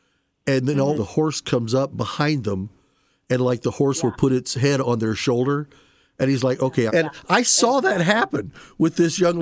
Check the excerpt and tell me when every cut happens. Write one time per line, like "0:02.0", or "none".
0:00.9
0:06.9